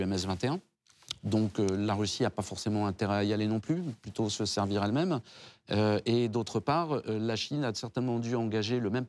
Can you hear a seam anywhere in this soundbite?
no; 0 cuts

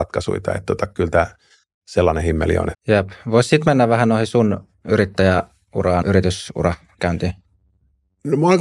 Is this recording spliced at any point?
yes; 2 cuts; at 2.7 s, 6.0 s

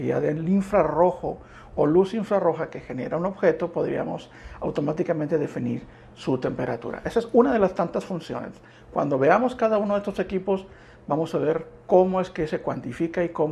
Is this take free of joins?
yes; 0 cuts

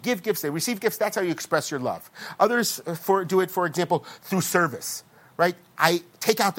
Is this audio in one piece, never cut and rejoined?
yes; 0 cuts

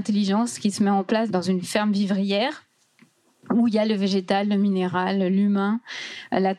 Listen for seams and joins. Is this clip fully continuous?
yes; 0 cuts

